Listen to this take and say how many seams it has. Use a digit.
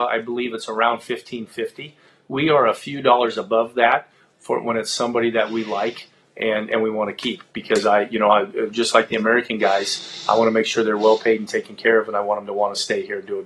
0